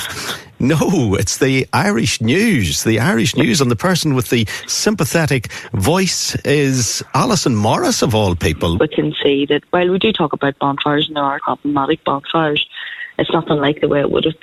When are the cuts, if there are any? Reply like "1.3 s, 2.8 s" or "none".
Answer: 8.8 s, 11.4 s